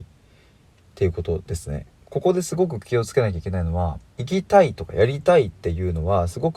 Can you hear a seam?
yes; 2 cuts; at 2.0 s, 4.1 s

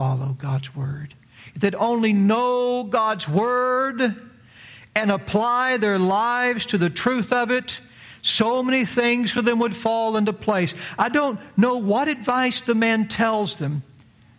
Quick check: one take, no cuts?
yes; 0 cuts

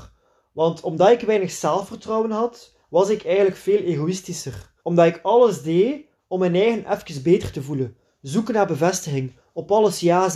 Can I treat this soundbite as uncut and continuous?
no; 1 cut; at 4.8 s

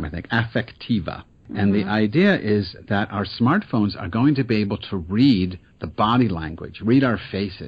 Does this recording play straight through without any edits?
yes; 0 cuts

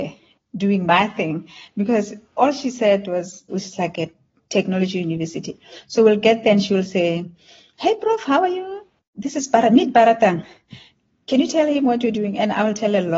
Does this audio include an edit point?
yes; 1 cut; at 3.5 s

